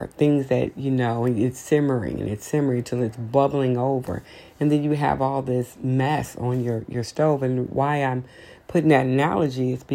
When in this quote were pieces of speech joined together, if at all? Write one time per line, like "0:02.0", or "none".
none